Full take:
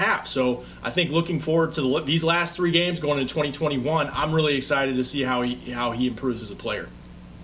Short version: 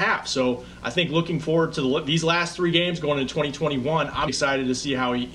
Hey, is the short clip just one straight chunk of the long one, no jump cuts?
no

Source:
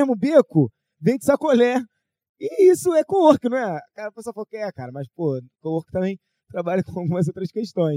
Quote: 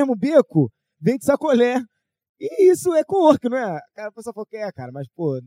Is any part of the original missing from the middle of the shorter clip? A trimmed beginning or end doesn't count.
no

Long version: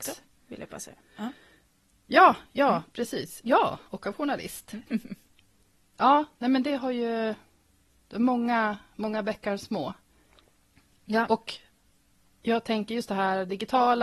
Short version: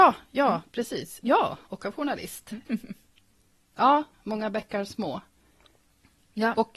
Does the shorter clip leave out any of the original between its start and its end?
yes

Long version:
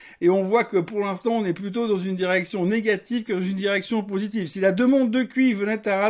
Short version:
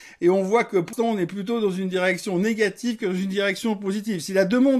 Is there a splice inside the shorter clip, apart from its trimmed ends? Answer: yes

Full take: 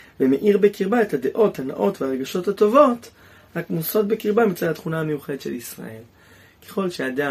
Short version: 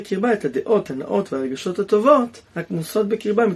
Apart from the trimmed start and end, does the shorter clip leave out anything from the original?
yes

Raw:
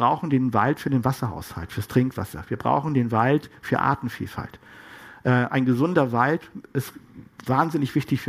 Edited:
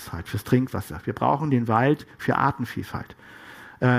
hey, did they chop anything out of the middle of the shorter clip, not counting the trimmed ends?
no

